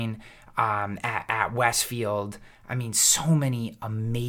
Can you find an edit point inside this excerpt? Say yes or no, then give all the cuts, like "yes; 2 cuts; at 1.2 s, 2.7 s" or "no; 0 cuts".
no; 0 cuts